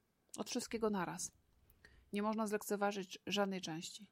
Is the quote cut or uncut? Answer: uncut